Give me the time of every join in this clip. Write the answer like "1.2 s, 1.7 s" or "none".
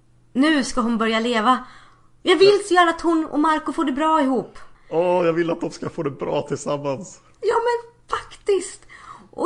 4.7 s